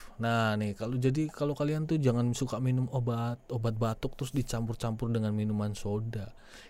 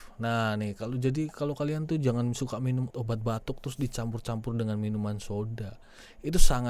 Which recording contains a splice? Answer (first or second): second